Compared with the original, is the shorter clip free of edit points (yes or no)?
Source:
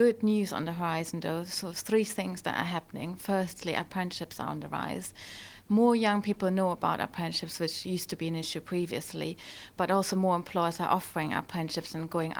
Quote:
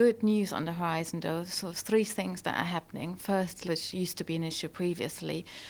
no